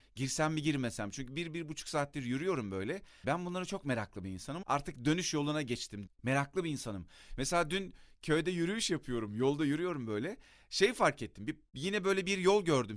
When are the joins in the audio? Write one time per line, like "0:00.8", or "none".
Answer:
0:03.2
0:04.6
0:06.1

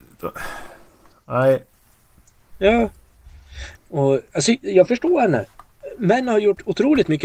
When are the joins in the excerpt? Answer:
0:02.5
0:03.8

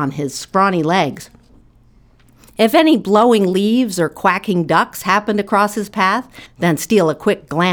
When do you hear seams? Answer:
0:06.5

